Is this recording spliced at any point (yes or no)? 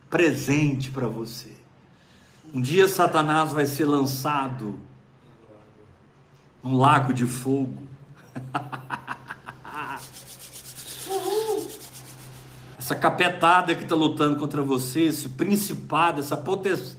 yes